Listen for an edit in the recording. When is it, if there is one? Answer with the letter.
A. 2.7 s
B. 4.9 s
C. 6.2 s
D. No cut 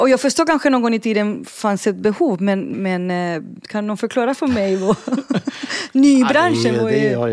A